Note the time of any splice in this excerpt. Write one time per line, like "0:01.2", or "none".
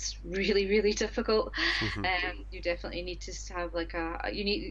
none